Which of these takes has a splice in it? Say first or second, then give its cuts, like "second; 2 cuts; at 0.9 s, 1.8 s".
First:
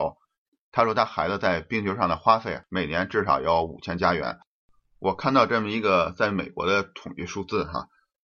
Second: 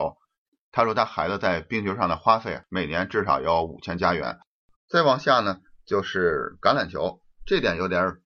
second; 1 cut; at 4.7 s